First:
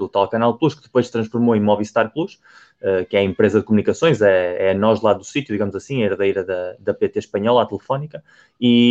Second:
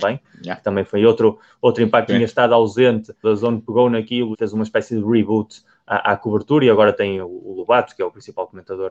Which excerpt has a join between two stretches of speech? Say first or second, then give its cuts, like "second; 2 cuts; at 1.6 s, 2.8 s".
second; 3 cuts; at 2.1 s, 3.2 s, 4.3 s